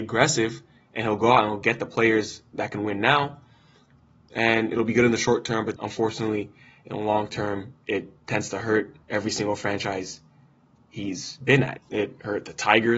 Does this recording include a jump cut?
yes; 2 cuts; at 5.8 s, 11.8 s

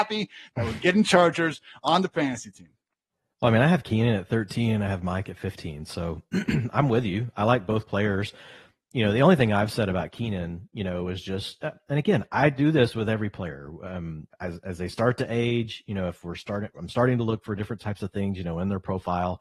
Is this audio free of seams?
no; 1 cut; at 14.3 s

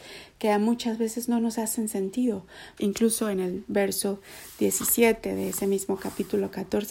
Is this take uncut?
no; 1 cut; at 2.8 s

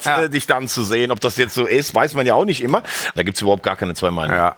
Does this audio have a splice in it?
yes; 1 cut; at 3.2 s

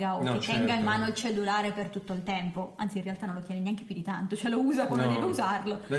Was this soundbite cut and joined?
no; 0 cuts

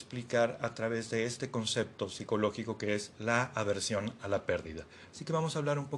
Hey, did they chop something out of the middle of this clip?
no; 0 cuts

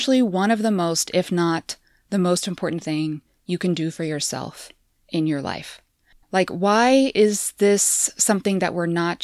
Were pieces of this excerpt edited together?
yes; 1 cut; at 6.2 s

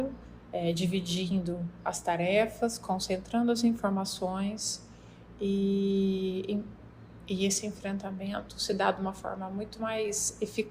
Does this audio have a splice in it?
no; 0 cuts

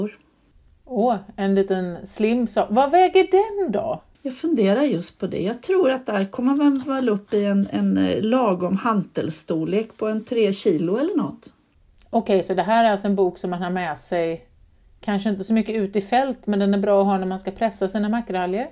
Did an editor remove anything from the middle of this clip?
no; 0 cuts

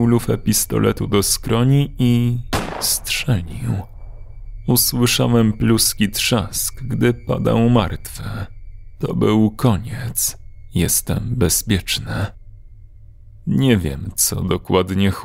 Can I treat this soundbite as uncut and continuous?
yes; 0 cuts

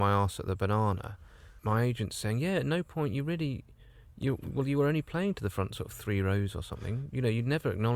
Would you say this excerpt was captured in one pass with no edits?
no; 1 cut; at 1.6 s

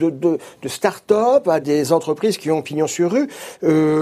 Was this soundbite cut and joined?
yes; 1 cut; at 1.6 s

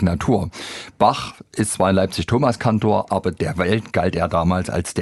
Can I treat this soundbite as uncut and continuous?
yes; 0 cuts

